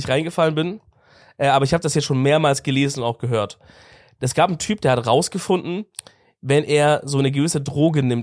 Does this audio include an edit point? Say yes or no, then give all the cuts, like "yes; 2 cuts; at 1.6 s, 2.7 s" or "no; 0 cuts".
no; 0 cuts